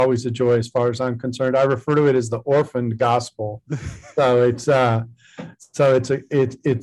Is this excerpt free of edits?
yes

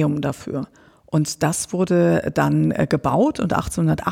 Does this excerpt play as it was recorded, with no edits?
yes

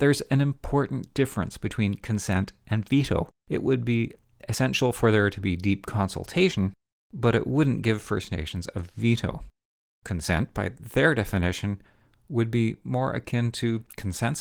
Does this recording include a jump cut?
yes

